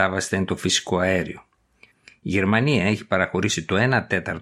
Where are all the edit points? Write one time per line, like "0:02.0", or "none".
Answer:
0:01.9